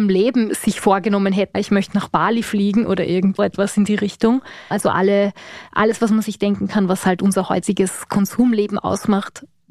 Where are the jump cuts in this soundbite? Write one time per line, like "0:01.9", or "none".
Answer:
0:01.5
0:03.4
0:04.7